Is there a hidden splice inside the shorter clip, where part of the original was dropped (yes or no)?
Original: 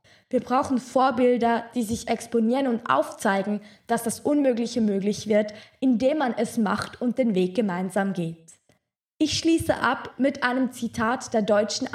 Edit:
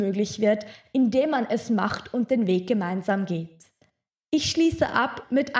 no